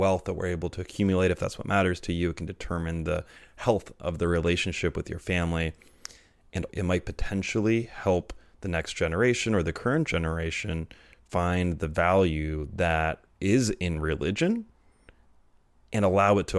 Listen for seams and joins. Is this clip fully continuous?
no; 1 cut; at 6.7 s

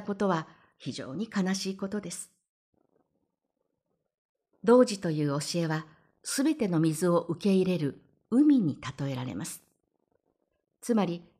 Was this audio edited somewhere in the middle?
no; 0 cuts

